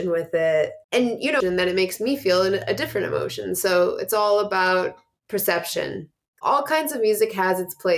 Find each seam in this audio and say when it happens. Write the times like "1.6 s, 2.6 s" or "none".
1.4 s, 6.4 s